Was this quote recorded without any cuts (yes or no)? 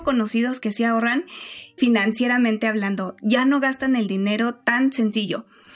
no